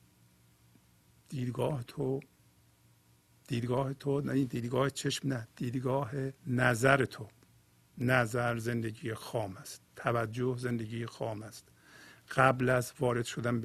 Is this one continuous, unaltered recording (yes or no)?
no